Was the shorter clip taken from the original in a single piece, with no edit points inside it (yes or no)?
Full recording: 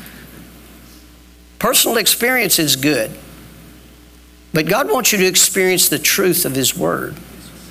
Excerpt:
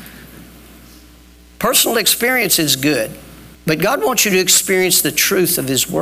no